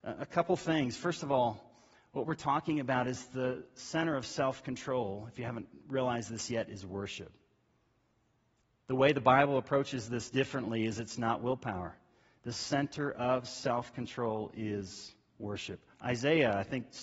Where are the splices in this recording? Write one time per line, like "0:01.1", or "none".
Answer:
0:15.9